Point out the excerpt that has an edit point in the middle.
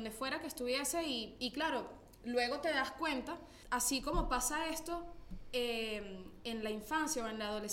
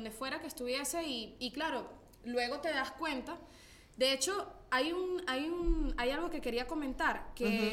first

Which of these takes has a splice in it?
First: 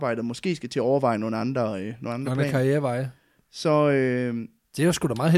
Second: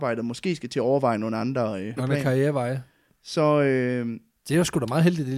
second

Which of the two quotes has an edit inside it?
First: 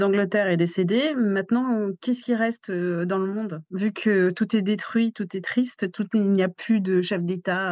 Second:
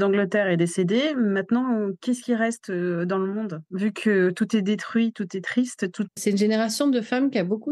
second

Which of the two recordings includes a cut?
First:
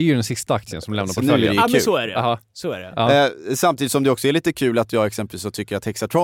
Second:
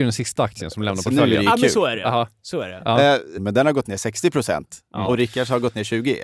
second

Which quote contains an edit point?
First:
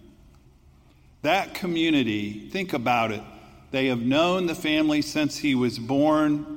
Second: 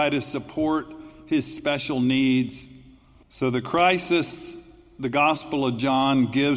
second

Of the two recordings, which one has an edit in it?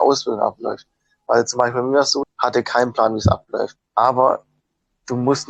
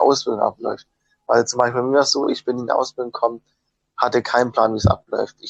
first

